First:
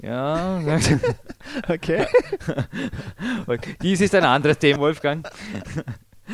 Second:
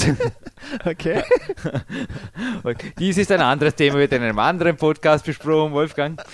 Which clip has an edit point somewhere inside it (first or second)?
first